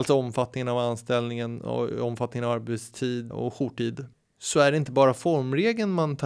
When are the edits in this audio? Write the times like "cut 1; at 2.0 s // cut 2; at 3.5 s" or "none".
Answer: cut 1; at 3.3 s